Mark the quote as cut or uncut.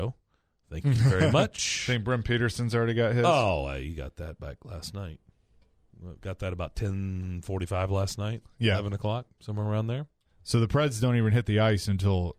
uncut